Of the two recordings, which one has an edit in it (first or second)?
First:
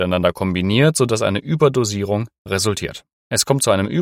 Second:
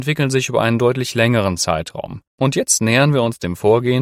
second